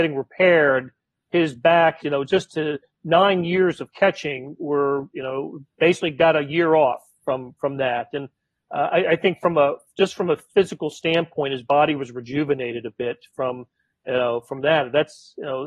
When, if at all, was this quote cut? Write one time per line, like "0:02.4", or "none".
0:02.0